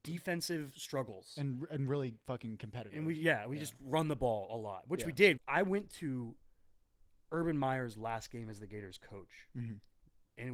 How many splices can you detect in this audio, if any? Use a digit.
1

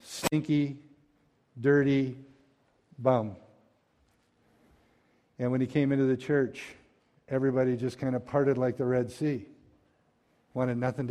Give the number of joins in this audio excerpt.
0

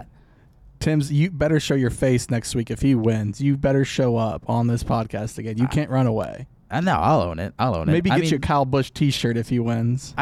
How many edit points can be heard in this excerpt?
0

